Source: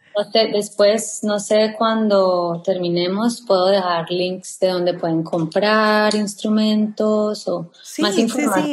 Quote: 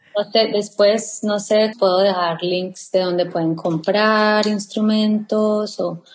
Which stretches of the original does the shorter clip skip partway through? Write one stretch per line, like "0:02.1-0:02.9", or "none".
0:01.7-0:03.4

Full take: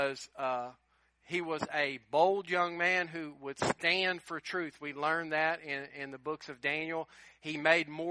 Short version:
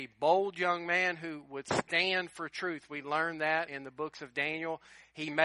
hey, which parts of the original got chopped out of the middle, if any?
0:05.6-0:05.9

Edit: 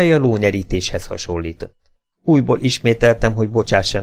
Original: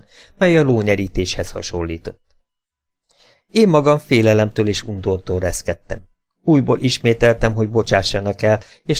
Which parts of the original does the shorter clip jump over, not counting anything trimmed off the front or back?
0:02.6-0:06.3

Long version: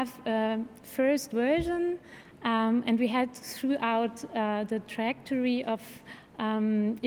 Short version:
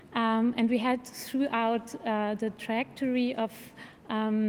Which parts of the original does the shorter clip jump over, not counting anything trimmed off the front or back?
none

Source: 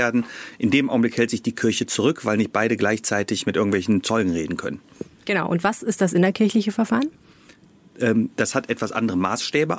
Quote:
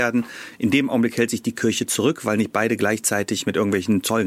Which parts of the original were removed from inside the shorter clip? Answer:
none

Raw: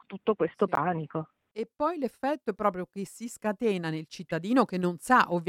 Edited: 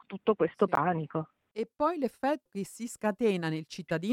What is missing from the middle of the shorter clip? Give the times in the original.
0:02.5-0:02.9

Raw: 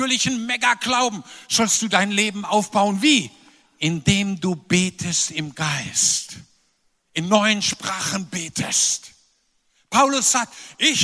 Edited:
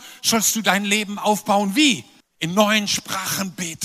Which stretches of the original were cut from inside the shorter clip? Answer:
0:03.5-0:06.9

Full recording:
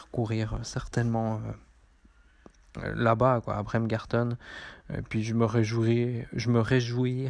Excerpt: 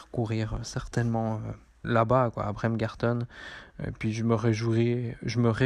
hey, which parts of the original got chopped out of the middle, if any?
0:01.8-0:02.9

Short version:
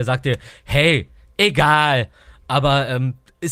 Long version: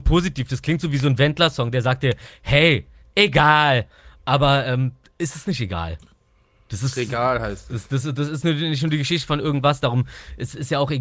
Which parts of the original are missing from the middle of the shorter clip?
none

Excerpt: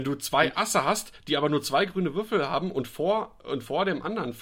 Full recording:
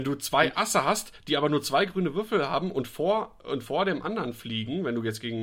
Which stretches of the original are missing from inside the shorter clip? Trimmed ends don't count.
none

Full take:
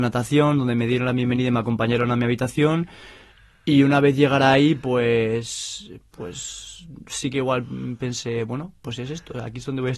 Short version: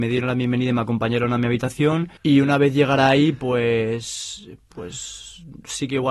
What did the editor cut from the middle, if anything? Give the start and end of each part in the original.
0:02.9-0:03.6

